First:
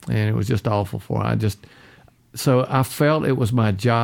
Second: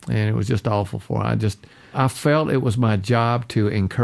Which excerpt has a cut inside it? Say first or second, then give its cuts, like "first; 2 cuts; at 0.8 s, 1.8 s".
second; 1 cut; at 1.9 s